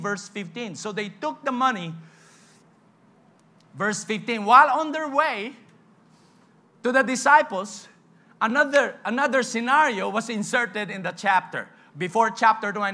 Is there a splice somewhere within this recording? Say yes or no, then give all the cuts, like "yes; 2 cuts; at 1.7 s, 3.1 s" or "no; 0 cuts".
yes; 1 cut; at 11.9 s